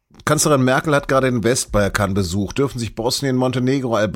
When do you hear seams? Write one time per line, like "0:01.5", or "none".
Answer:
none

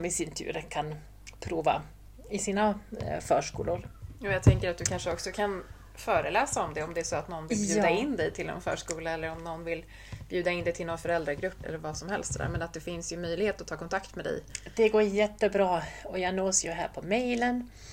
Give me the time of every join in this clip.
0:11.6

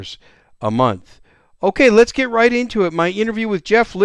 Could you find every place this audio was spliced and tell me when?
none

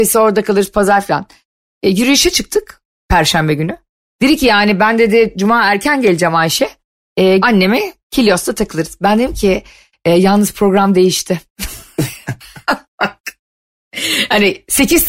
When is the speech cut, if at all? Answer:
0:07.4

